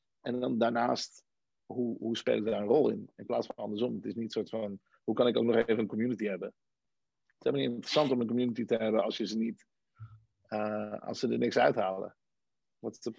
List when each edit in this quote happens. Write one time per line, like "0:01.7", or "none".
none